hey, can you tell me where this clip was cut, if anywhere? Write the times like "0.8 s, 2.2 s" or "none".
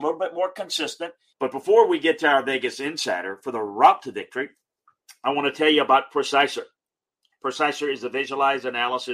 1.3 s